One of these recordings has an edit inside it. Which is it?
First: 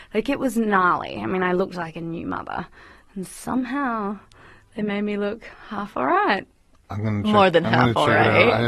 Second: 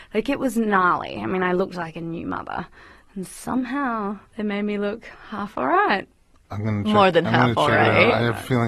second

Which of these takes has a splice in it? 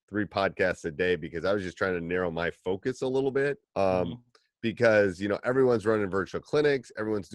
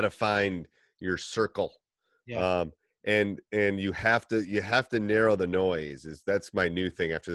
first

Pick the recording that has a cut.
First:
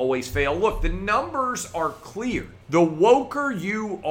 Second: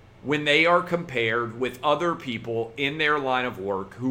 first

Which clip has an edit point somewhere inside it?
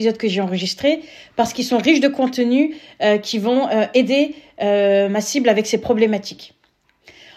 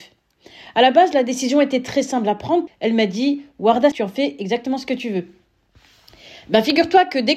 second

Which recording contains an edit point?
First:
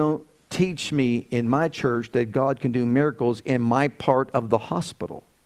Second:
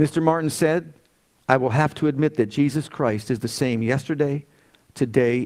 second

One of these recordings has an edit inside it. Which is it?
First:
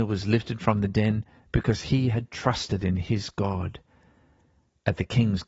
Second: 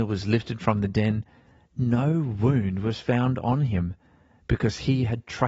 first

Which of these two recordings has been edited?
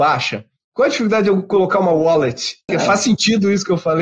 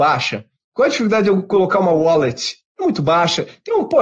first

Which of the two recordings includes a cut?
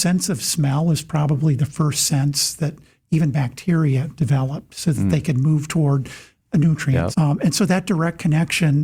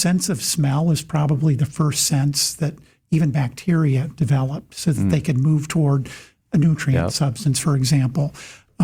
first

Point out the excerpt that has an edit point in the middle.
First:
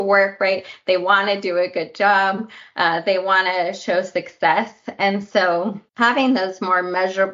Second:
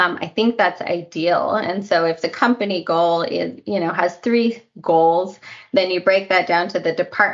first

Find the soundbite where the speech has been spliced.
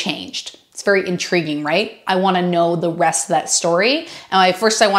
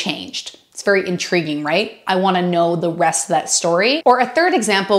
second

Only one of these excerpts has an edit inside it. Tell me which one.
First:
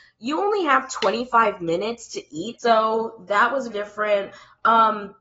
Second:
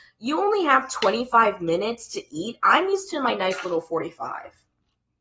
first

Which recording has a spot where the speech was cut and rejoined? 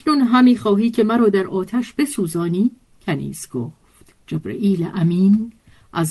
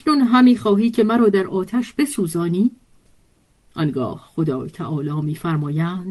first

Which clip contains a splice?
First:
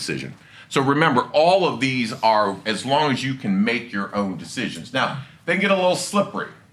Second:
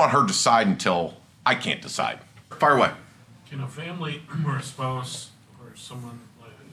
second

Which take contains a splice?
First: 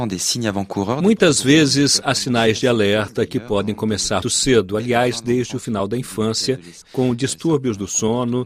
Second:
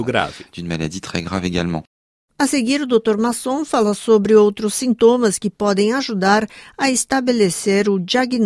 first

